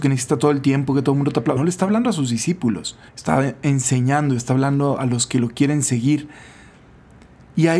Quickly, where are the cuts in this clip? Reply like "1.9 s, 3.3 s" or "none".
1.6 s, 3.1 s